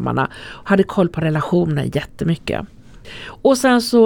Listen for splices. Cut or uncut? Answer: uncut